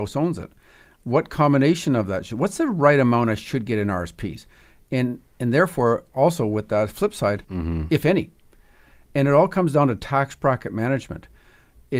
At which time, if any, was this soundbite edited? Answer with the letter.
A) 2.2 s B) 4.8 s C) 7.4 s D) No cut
C